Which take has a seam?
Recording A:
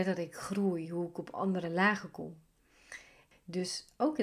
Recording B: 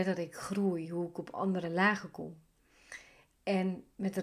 A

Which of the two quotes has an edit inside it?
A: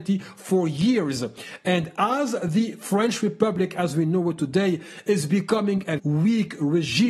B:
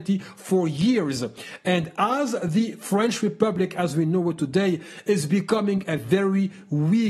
A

